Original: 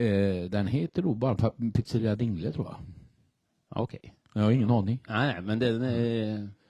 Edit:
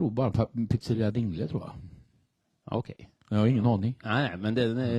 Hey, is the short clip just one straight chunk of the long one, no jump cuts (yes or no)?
yes